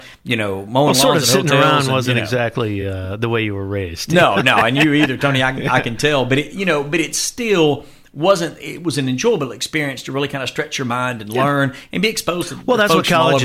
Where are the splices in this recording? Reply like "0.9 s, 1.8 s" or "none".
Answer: none